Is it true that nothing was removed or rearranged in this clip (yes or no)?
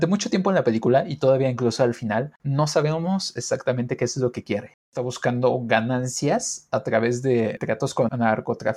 no